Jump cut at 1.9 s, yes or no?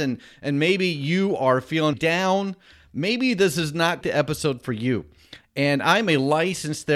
yes